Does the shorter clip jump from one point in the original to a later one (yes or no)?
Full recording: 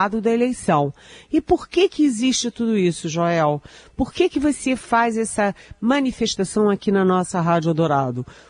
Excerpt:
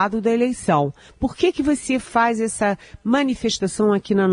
yes